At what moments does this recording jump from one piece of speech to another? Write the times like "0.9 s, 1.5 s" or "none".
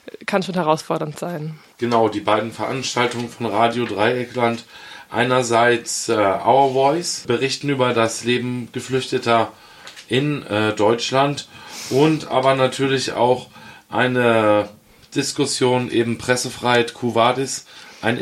none